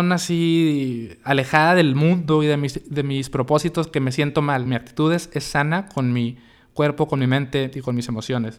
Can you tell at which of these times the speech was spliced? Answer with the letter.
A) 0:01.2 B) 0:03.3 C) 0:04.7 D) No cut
C